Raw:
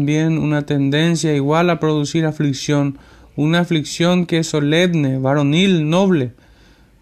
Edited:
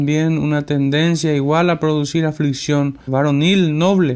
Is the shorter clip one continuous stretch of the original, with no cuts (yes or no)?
no